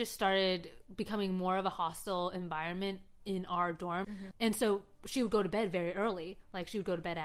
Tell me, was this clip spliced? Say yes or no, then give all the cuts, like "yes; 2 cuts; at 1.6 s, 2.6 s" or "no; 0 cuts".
yes; 1 cut; at 4.0 s